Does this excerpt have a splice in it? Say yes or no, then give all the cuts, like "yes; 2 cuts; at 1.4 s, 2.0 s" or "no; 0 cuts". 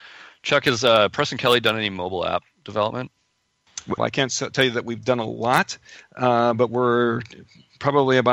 yes; 1 cut; at 4.0 s